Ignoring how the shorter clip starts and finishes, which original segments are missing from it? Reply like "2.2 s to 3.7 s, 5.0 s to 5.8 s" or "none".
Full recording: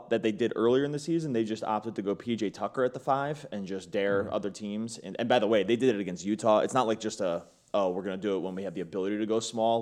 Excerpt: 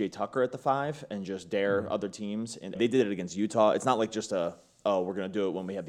5.2 s to 5.6 s